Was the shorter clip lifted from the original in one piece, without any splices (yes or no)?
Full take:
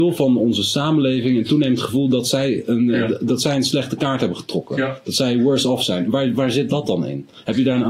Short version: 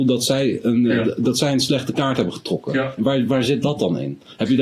no